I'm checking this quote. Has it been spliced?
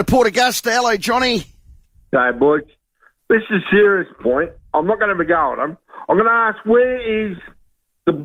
no; 0 cuts

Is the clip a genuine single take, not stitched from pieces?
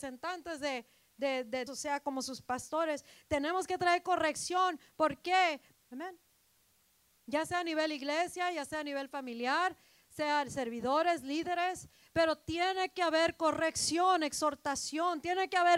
no; 2 cuts; at 1.7 s, 5.7 s

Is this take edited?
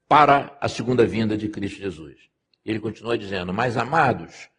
yes; 1 cut; at 2.5 s

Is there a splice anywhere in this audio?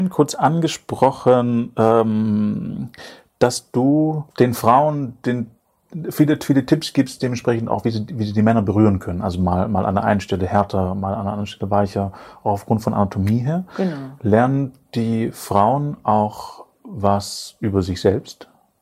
yes; 1 cut; at 4.3 s

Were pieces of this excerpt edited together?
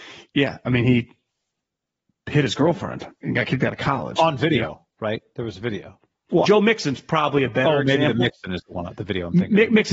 yes; 1 cut; at 6.4 s

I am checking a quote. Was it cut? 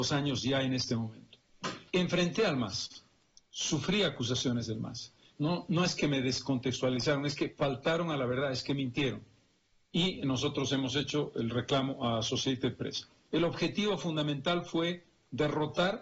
yes; 3 cuts; at 1.9 s, 5.4 s, 13.3 s

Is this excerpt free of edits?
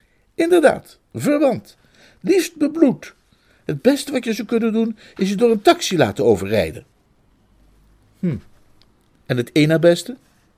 yes; 0 cuts

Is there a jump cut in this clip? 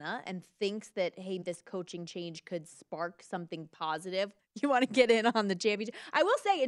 yes; 2 cuts; at 1.4 s, 4.4 s

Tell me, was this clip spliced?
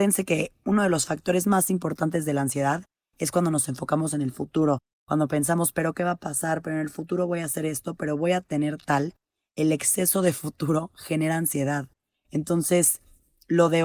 no; 0 cuts

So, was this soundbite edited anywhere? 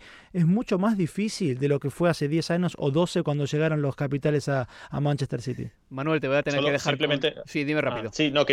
no; 0 cuts

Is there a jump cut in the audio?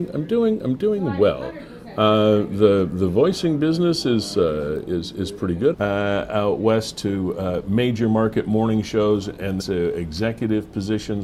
yes; 2 cuts; at 5.7 s, 9.6 s

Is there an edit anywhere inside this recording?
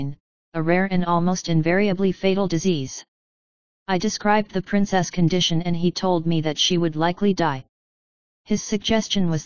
no; 0 cuts

